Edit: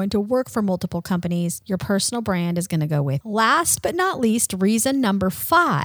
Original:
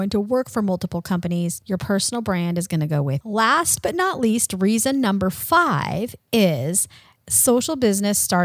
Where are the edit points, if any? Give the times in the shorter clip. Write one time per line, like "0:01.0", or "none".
none